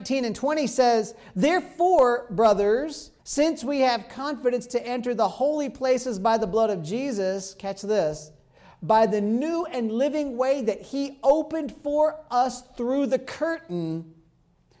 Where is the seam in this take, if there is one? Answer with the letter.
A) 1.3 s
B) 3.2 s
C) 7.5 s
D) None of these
B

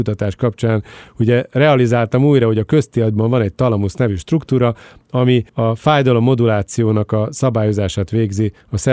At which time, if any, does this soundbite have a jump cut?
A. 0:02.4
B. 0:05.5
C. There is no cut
B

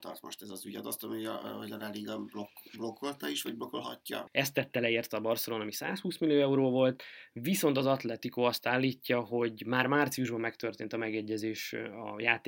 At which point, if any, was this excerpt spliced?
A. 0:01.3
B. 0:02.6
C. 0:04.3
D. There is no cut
C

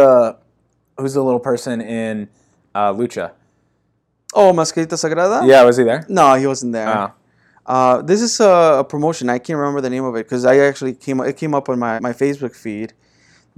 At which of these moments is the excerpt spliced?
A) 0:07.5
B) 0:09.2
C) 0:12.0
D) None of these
C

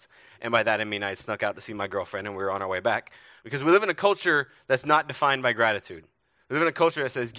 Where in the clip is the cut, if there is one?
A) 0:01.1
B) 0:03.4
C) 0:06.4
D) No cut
B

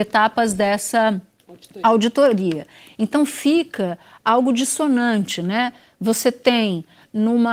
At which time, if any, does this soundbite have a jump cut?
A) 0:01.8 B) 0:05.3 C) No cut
C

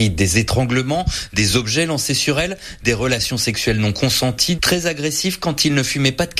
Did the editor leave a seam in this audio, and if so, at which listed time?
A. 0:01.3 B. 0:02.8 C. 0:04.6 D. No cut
C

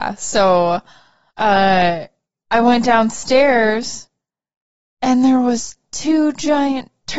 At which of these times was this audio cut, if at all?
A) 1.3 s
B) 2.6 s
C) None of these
A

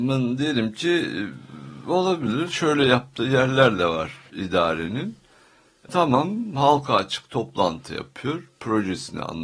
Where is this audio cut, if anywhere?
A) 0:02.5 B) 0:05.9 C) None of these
B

